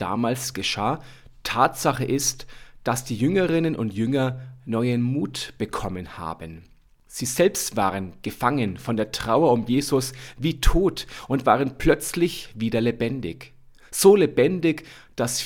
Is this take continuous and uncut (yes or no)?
yes